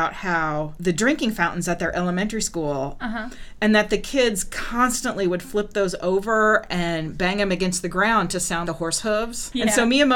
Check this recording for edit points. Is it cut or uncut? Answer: cut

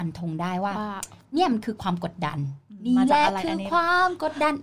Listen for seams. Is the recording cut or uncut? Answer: uncut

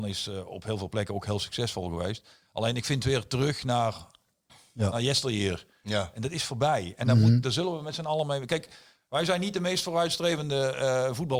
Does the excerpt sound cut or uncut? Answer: uncut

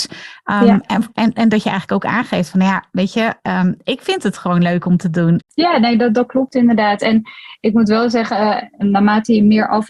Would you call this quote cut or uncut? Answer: cut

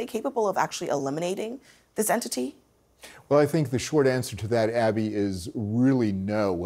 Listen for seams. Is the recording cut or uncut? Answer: uncut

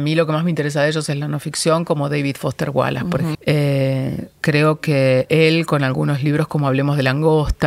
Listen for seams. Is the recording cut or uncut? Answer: cut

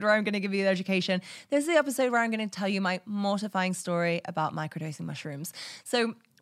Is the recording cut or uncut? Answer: uncut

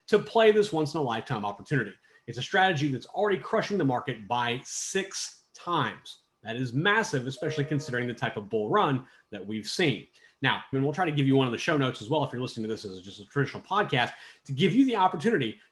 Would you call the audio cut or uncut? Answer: cut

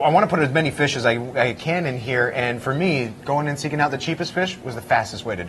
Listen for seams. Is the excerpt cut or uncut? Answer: uncut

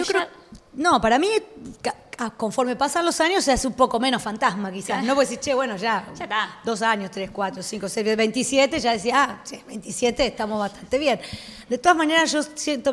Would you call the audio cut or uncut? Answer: uncut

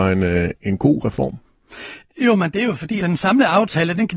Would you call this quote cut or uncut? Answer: cut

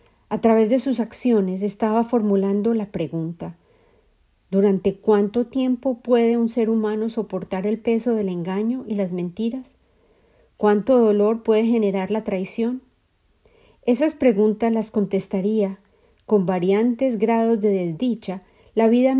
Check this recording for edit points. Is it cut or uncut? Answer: uncut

